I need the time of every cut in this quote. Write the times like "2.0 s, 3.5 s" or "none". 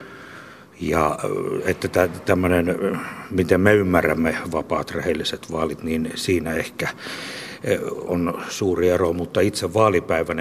8.1 s